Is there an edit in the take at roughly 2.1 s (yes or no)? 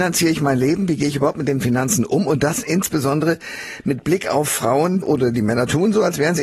no